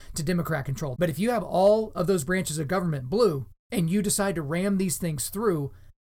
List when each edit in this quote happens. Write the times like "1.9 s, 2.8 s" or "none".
1.0 s, 3.6 s